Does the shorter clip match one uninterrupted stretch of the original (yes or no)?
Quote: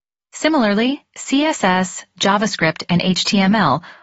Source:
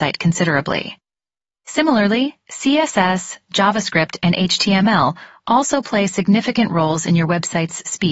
yes